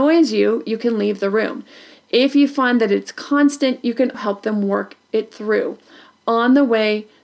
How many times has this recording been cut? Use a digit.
1